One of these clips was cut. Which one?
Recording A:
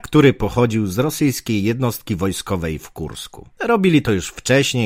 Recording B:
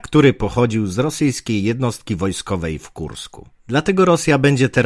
A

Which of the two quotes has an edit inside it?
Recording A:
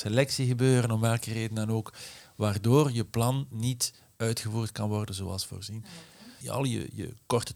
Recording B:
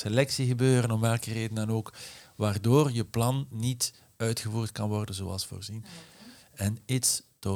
A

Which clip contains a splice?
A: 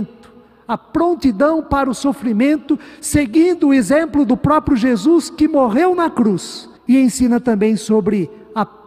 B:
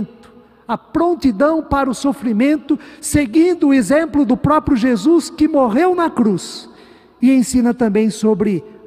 A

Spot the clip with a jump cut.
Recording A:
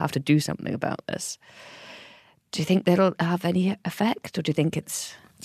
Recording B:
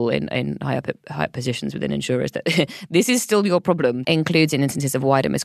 B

